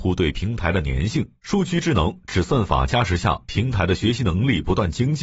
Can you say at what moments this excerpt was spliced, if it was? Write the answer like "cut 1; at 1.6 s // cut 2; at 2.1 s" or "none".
cut 1; at 1.4 s